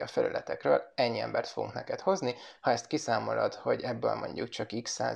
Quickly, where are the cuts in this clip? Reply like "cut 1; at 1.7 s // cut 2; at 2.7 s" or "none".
none